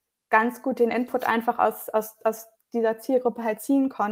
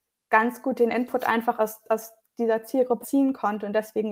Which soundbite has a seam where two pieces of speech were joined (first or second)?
second